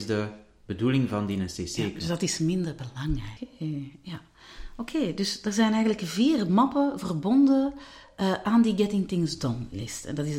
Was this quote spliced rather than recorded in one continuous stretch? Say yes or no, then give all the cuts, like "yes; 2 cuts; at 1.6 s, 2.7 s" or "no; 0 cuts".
yes; 1 cut; at 3.4 s